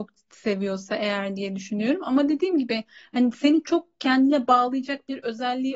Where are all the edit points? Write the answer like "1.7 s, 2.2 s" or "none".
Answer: none